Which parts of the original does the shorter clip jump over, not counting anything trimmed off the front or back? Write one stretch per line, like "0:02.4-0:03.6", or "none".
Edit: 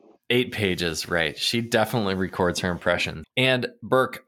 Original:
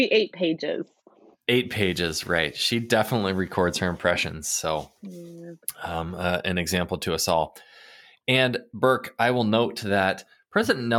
0:04.4-0:08.1